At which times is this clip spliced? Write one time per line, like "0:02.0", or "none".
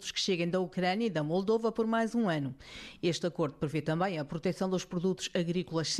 none

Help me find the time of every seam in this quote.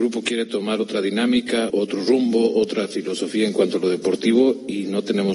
0:01.7

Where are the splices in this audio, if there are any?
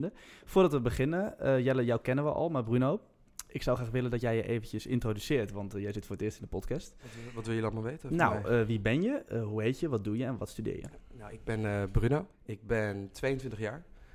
0:12.3

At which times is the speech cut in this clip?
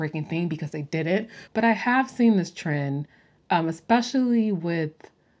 0:01.5

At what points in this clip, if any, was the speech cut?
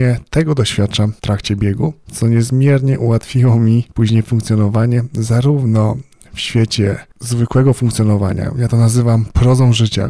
none

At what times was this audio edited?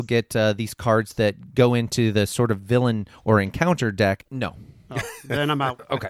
0:04.3

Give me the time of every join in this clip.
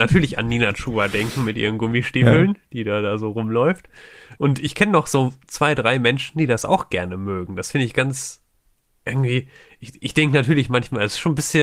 0:04.3

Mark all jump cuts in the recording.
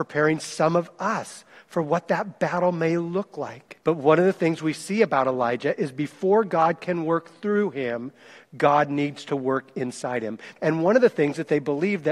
0:03.8
0:10.6

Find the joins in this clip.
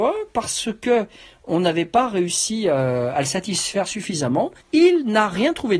0:04.6

